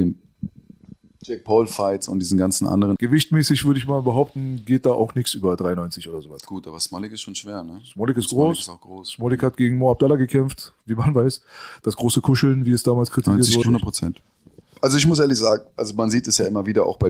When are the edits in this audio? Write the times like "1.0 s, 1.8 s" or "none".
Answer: 3.0 s, 13.6 s